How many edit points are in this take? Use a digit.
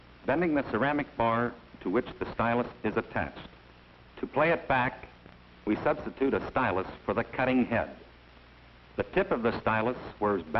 1